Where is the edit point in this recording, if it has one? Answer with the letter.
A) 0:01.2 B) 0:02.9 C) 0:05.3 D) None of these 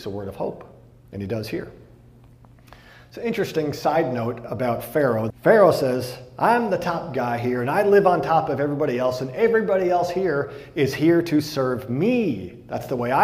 C